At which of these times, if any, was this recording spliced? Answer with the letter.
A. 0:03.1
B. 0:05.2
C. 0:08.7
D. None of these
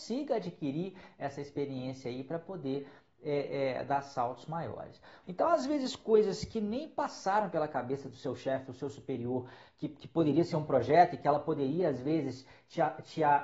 B